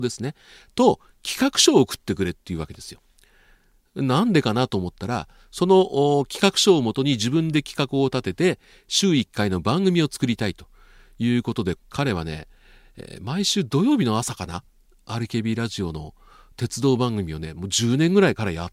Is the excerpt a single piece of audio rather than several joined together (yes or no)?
no